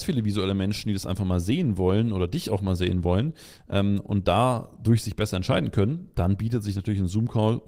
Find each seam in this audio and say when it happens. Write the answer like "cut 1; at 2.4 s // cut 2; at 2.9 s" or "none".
none